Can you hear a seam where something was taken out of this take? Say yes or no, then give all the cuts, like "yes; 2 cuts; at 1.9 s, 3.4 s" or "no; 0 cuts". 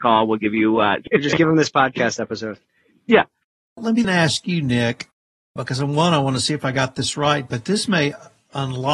yes; 2 cuts; at 1.1 s, 4.0 s